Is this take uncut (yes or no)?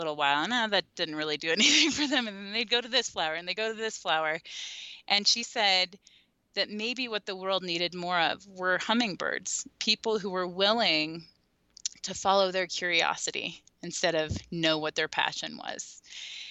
yes